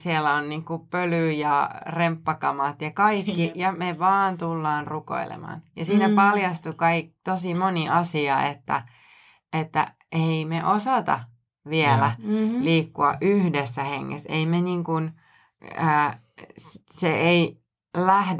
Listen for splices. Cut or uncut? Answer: uncut